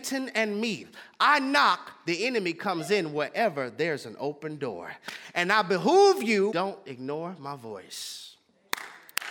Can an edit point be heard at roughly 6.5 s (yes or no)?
yes